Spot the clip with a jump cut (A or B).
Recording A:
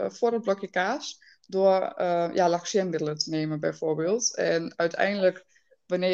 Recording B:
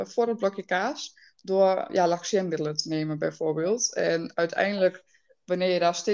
B